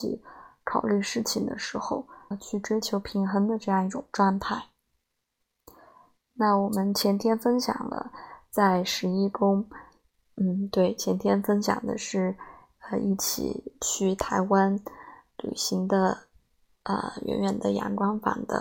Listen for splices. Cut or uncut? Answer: cut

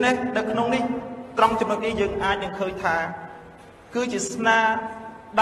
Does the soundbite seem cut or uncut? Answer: uncut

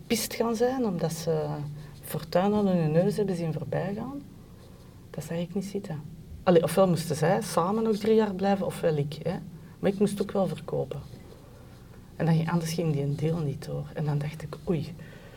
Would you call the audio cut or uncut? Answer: cut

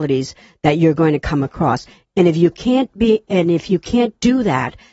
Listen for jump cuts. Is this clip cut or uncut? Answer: uncut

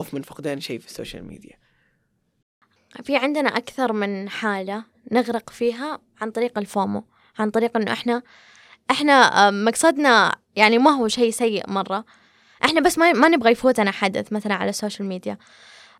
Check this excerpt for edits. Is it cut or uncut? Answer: uncut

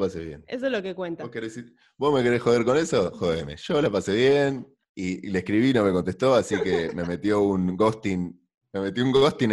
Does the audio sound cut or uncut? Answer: uncut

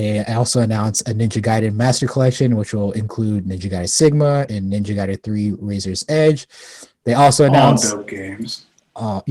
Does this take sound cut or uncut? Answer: cut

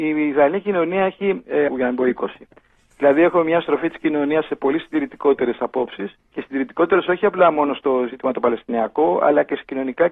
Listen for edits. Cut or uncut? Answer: cut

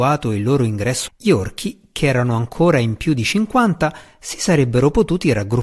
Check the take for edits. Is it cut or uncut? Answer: cut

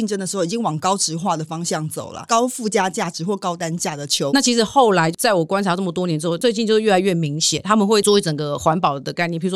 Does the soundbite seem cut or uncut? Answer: cut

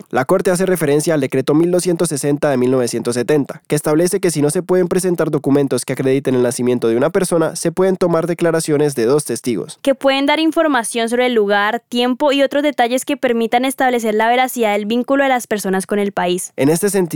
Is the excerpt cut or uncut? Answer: uncut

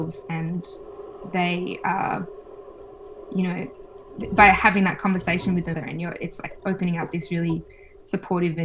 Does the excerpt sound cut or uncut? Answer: cut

